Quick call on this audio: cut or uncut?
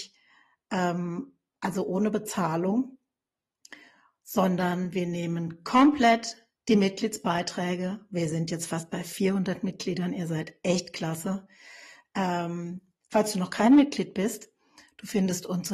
uncut